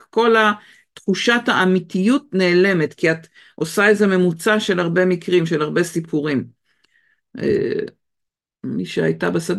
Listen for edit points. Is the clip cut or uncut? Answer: uncut